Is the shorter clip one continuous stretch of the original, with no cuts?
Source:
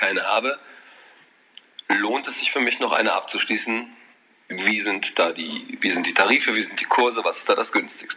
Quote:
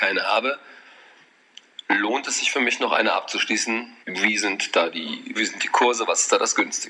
no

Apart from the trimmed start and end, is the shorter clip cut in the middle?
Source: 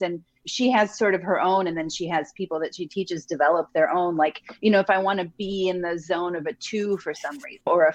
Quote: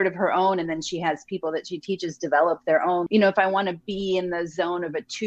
yes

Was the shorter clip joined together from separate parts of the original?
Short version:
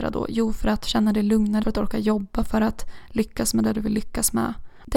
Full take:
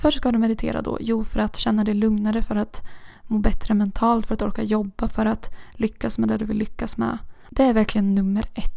yes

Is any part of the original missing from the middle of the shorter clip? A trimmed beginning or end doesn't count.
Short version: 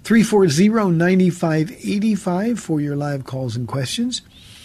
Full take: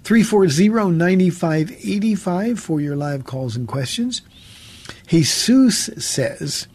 no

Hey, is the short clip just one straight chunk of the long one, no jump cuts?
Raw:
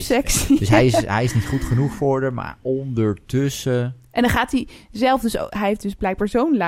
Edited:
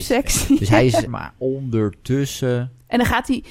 no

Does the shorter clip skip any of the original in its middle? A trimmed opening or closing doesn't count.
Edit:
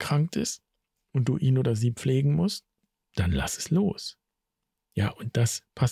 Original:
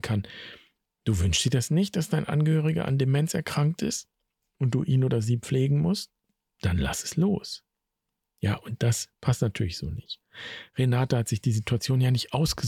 no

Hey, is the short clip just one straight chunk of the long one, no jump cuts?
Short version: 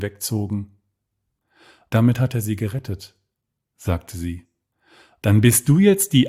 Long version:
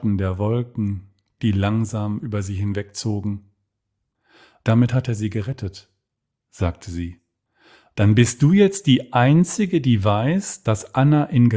yes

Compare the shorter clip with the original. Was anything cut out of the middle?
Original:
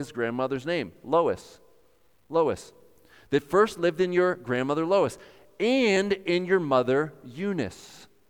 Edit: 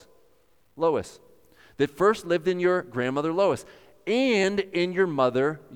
no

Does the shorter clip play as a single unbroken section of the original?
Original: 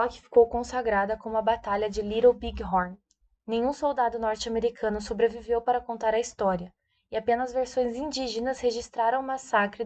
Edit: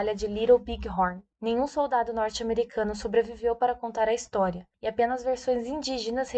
no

